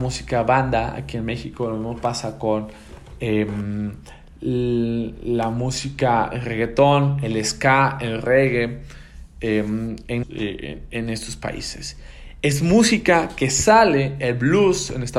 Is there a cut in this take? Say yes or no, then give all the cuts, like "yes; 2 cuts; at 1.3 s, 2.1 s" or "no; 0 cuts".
yes; 1 cut; at 10.2 s